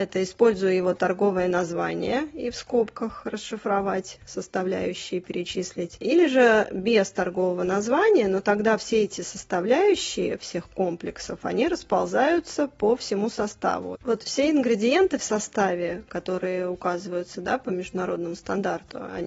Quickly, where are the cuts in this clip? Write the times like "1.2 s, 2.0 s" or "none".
14.0 s

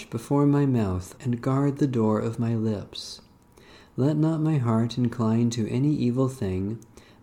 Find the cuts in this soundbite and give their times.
1.2 s

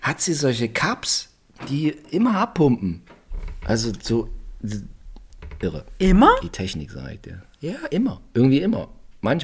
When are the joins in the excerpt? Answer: none

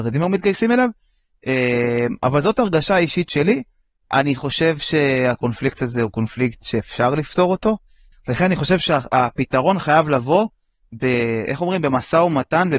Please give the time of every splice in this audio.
4.0 s, 8.1 s

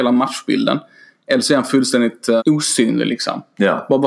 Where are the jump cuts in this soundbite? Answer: 2.4 s

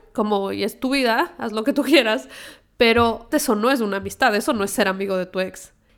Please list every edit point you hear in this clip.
3.3 s

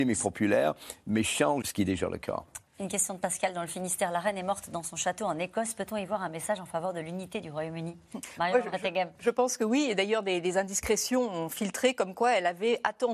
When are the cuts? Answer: 1.6 s

